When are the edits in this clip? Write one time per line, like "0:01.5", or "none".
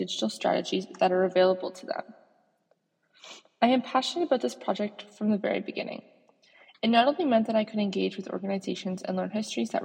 none